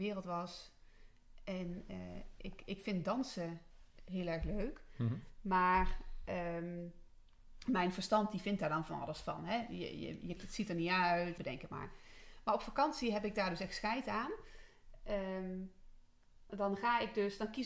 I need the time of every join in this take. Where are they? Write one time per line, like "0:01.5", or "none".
0:10.4
0:11.4
0:16.5